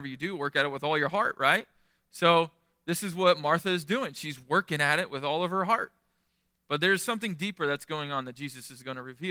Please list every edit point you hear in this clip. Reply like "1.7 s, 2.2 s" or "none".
none